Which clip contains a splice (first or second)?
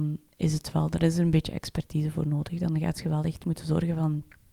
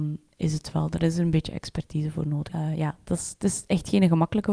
second